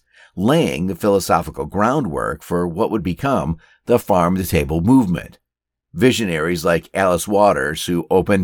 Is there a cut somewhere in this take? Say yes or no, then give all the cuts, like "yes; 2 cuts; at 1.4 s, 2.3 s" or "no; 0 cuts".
yes; 1 cut; at 5.8 s